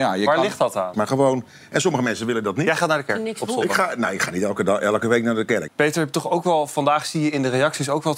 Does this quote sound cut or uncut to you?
cut